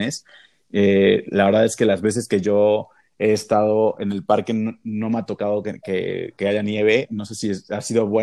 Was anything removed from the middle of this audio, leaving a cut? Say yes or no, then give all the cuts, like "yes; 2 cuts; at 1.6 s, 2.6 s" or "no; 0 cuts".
no; 0 cuts